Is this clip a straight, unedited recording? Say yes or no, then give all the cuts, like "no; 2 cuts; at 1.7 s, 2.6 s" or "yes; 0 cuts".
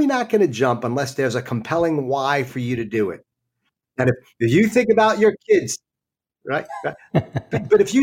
yes; 0 cuts